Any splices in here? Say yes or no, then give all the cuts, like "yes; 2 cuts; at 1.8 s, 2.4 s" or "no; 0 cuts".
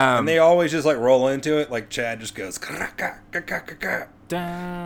no; 0 cuts